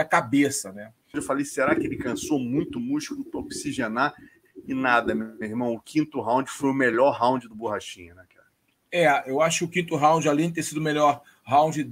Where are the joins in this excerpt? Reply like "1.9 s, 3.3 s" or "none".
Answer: 1.1 s